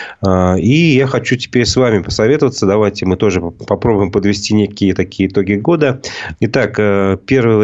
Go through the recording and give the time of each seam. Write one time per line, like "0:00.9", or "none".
0:06.3